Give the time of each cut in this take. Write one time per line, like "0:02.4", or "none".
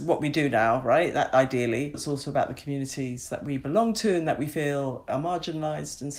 0:01.9